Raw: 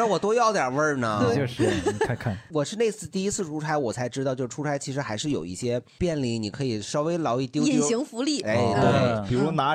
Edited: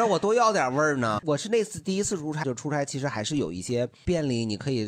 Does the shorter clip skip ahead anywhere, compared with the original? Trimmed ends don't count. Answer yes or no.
yes